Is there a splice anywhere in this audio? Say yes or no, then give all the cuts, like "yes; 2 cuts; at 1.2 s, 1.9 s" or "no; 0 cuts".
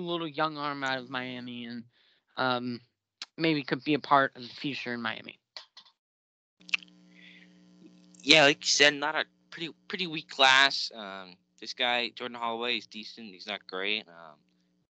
no; 0 cuts